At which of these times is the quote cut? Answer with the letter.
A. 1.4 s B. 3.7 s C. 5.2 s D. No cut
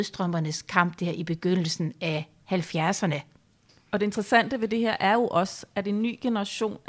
D